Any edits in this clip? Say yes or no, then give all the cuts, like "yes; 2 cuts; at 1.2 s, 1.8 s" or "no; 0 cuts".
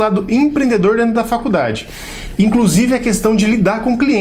no; 0 cuts